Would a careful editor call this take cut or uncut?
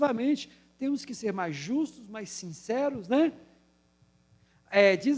uncut